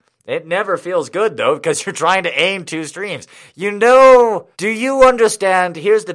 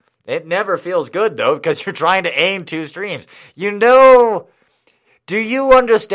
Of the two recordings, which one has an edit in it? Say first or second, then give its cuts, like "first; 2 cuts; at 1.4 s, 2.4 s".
first; 1 cut; at 4.5 s